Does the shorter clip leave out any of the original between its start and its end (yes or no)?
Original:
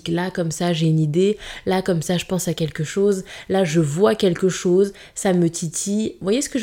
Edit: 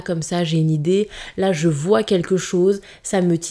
yes